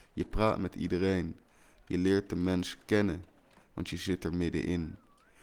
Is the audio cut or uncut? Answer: uncut